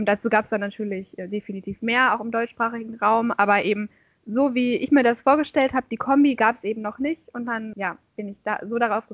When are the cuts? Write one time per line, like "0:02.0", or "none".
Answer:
0:07.7

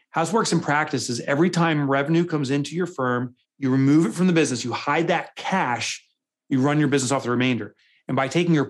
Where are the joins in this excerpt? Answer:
0:03.4

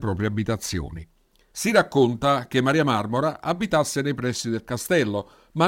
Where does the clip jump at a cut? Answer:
0:01.5

